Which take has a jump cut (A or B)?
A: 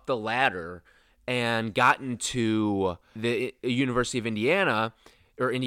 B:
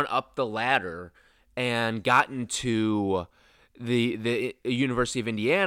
A